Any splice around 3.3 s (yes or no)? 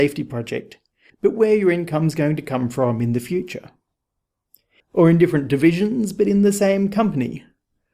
no